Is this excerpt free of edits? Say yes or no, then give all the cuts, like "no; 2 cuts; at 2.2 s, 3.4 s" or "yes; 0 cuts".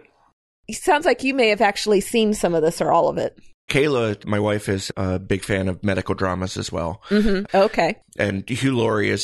no; 2 cuts; at 3.7 s, 7.5 s